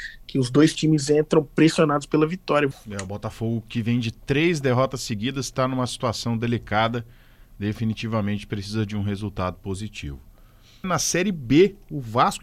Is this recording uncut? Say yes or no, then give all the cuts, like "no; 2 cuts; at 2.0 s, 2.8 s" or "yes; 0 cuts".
no; 2 cuts; at 2.7 s, 10.8 s